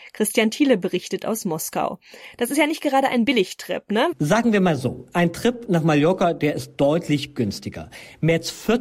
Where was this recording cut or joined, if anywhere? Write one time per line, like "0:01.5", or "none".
0:04.1